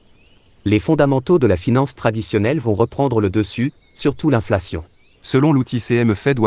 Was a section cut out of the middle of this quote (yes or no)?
yes